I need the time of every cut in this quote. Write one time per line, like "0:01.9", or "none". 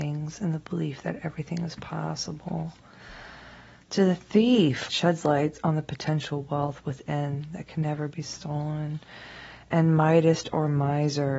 0:04.9